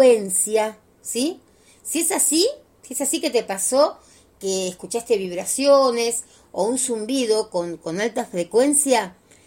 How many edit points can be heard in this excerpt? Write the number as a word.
zero